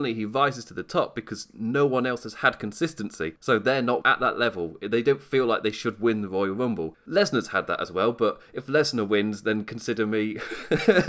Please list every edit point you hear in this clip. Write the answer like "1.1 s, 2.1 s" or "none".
none